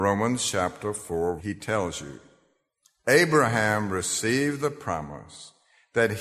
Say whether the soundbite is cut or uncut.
cut